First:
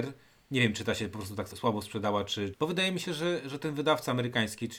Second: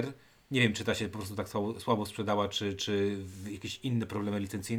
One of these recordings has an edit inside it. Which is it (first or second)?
first